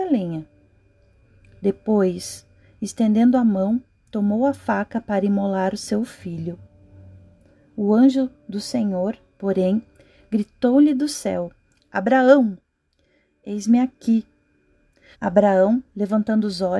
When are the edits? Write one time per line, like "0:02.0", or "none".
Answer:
0:11.8
0:15.1